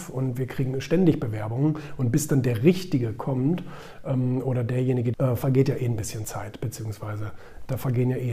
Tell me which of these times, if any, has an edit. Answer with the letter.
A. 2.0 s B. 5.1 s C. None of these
B